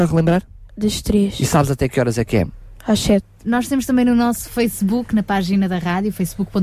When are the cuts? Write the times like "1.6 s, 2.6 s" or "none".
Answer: 3.4 s

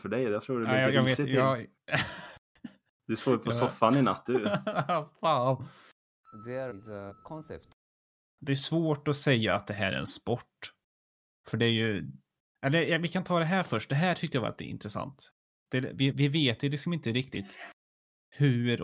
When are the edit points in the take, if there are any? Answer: 16.1 s

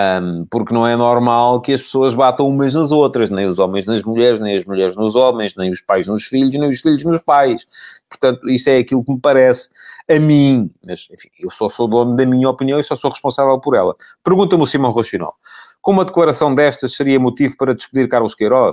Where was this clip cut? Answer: none

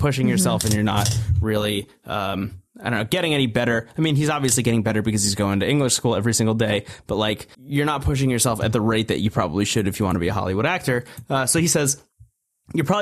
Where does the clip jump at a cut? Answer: 7.5 s

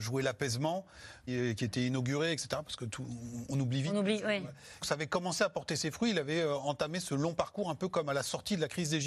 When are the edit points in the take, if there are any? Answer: 1.3 s, 4.8 s

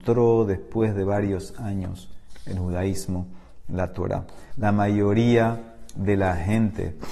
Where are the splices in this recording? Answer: 4.5 s

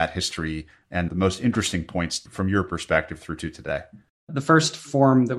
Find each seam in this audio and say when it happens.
1.1 s

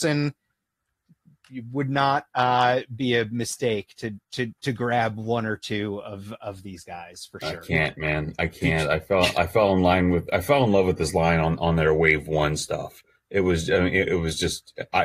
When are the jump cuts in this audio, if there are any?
none

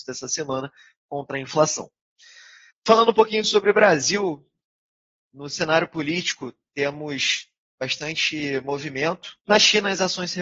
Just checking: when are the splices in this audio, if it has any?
2.7 s, 9.4 s

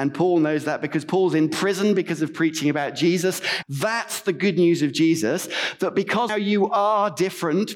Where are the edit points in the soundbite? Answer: 3.6 s, 6.3 s

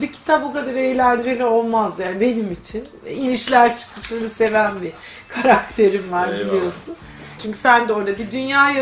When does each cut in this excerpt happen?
7.4 s

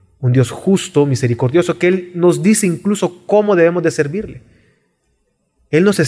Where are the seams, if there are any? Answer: none

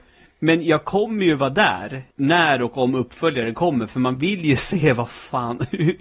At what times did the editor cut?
2.1 s

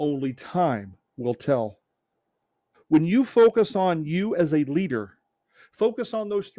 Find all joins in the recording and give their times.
2.7 s

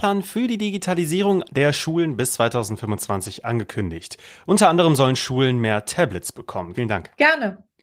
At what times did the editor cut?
6.7 s

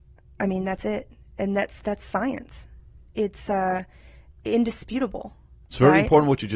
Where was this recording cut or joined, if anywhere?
none

